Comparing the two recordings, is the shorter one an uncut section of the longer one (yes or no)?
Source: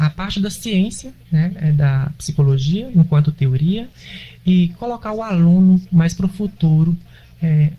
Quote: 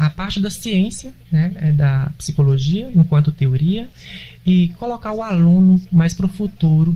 yes